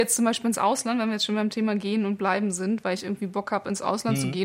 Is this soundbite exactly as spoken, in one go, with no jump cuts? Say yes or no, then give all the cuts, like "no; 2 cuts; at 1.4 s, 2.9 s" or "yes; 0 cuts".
yes; 0 cuts